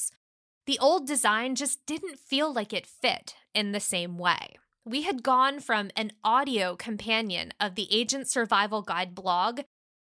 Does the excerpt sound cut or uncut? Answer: uncut